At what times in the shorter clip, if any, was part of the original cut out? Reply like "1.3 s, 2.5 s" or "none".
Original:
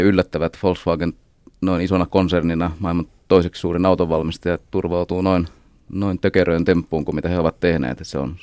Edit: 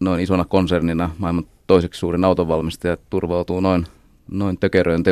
none